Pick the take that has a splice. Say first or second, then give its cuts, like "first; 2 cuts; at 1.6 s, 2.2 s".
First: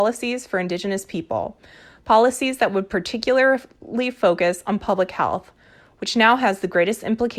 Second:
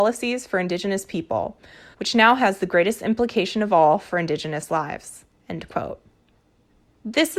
second; 1 cut; at 1.9 s